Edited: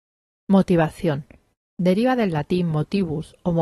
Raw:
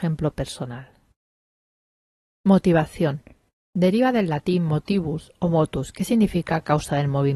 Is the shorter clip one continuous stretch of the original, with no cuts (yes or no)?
yes